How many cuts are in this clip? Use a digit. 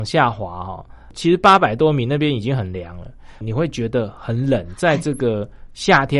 1